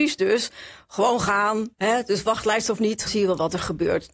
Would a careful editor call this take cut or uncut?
cut